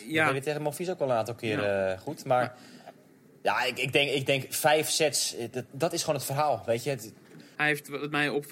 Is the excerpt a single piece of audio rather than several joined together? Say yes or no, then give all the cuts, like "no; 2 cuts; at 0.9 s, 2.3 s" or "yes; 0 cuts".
no; 2 cuts; at 5.7 s, 7.6 s